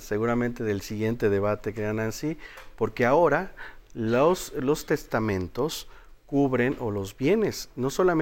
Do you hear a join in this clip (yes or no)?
no